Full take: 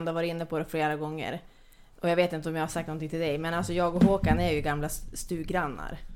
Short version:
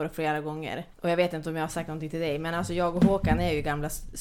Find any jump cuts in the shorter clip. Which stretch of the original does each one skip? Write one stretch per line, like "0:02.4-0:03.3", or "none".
0:01.5-0:01.9